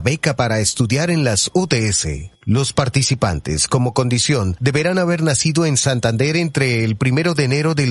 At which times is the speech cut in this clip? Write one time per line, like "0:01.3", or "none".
0:02.4